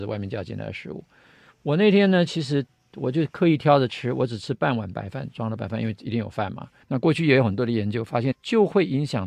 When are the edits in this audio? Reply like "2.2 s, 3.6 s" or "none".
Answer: 6.8 s, 8.3 s